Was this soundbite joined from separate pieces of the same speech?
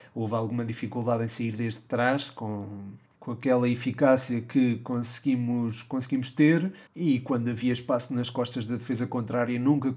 yes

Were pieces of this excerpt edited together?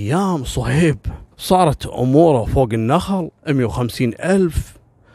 yes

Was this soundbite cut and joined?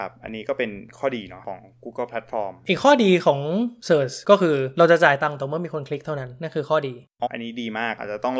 yes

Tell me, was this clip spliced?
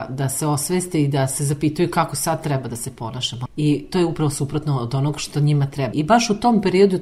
yes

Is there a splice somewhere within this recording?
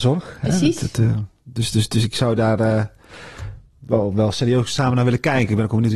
no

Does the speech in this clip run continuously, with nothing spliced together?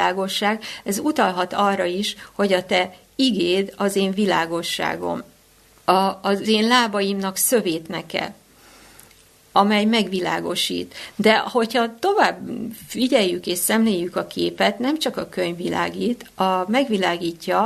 yes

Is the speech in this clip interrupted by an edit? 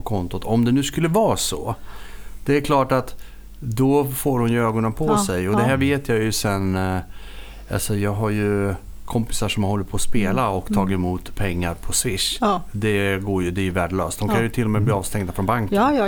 no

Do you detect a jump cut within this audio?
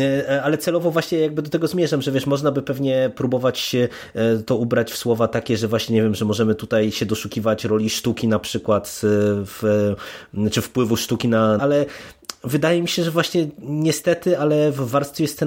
yes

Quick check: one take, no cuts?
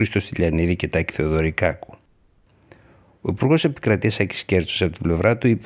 yes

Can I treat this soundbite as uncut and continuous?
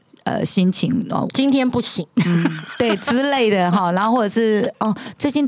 no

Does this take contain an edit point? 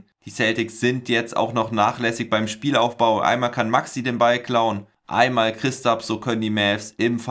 no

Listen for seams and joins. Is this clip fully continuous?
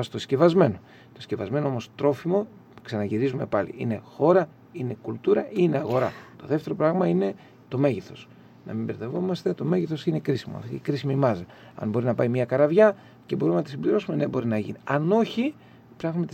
no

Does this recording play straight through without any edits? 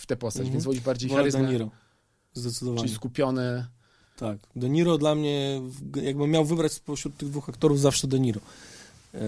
yes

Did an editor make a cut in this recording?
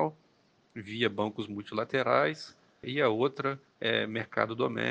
yes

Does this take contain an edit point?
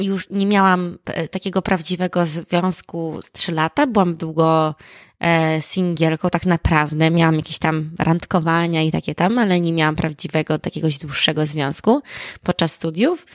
no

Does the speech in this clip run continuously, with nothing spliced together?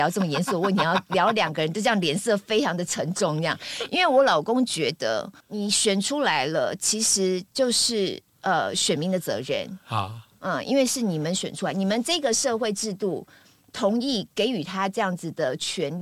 yes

